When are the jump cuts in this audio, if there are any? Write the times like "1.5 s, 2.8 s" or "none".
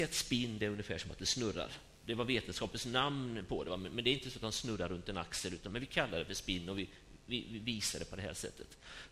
none

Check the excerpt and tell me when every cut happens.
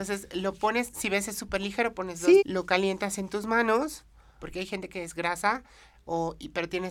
2.4 s, 4.4 s

